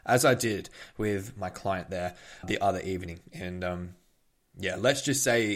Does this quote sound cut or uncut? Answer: cut